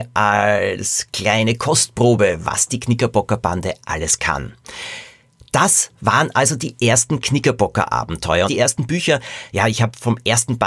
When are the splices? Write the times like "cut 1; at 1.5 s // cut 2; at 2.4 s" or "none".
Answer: cut 1; at 8.5 s